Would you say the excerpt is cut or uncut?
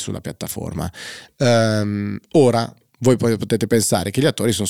uncut